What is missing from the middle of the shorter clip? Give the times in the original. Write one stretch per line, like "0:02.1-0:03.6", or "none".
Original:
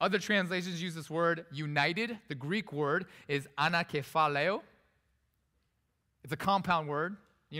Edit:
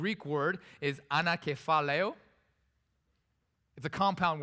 none